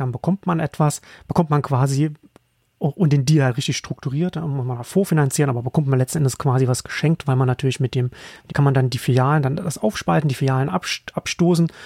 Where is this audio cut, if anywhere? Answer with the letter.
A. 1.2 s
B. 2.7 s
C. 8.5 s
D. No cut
C